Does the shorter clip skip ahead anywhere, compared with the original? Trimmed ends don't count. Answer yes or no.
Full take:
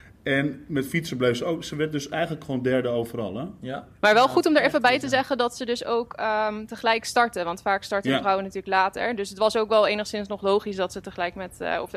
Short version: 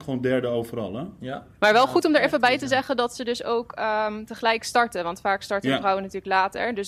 no